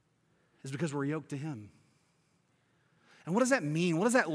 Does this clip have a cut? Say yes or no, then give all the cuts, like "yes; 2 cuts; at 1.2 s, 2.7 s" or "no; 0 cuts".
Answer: no; 0 cuts